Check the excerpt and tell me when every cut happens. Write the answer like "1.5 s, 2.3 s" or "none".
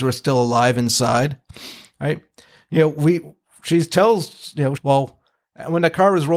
4.8 s